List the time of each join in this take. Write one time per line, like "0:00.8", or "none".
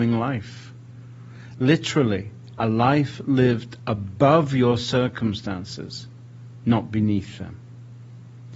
none